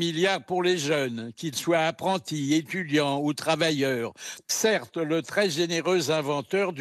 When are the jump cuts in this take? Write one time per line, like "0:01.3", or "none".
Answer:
0:04.4